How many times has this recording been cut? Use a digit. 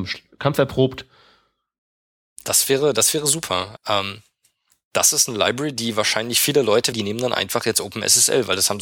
2